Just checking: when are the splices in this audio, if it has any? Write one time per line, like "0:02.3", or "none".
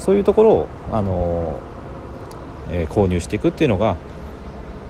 0:02.6